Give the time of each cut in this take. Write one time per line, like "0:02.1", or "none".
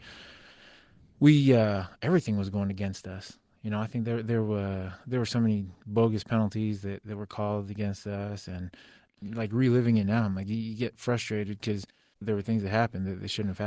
none

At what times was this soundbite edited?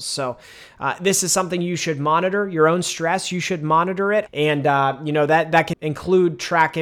0:04.3
0:05.7

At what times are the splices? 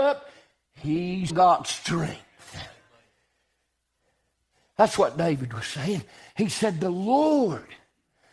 0:01.3

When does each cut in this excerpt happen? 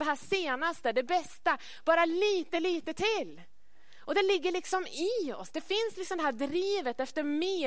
0:02.5

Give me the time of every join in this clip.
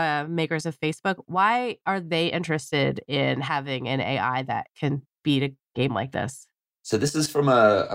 none

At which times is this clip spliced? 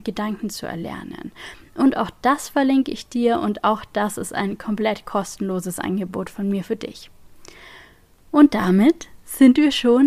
none

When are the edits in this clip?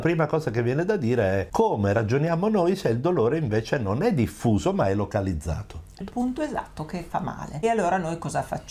0:06.0

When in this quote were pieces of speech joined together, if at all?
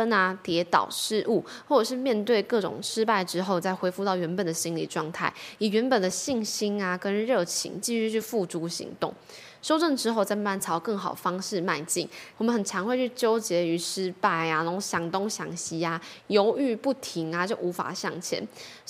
0:12.3

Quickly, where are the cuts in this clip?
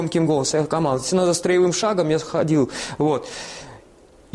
none

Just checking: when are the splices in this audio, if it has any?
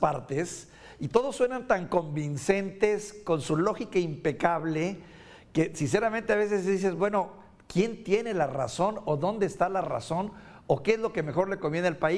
none

